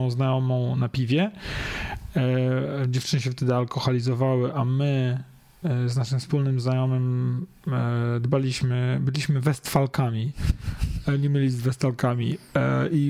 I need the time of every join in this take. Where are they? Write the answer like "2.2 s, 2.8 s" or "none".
none